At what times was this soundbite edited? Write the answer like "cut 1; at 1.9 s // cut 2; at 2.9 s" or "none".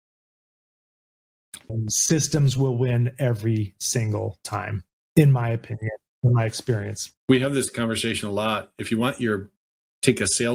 cut 1; at 1.7 s // cut 2; at 7.2 s